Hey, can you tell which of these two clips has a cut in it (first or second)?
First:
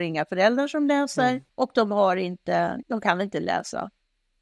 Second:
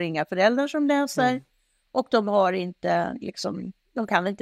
first